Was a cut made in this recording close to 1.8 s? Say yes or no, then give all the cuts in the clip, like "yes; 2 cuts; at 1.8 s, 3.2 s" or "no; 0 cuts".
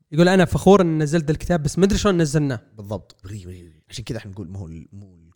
no; 1 cut; at 3.2 s